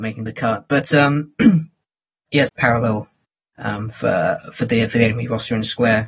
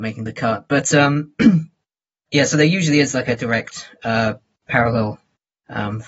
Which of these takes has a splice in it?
first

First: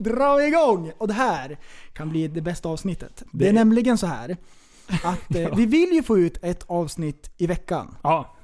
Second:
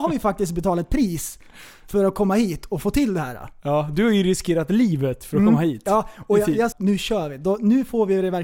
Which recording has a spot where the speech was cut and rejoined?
second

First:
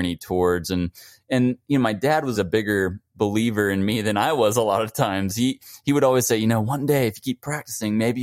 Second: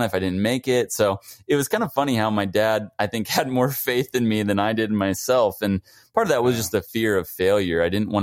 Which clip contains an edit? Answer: first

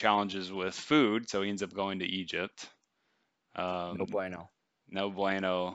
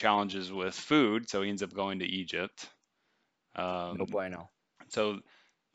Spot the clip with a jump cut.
second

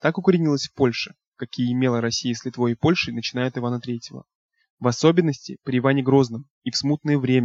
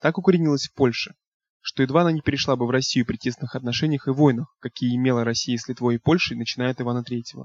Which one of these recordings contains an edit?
first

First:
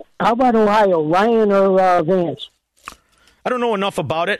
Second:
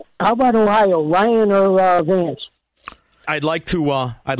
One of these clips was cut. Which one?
second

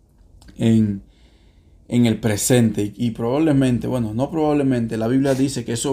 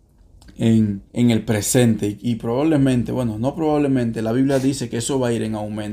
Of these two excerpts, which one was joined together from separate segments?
second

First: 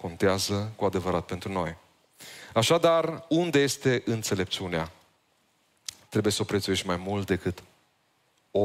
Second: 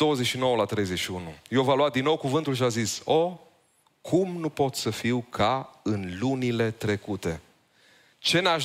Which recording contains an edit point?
first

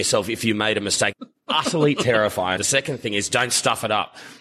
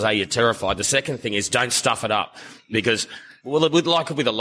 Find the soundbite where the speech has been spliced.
first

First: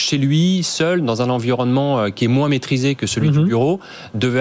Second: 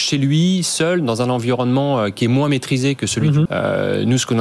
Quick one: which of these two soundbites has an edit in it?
second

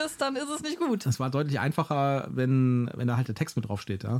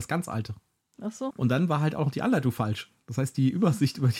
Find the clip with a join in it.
second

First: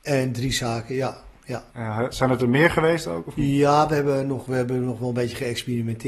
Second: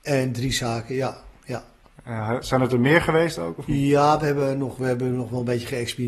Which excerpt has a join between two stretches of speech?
first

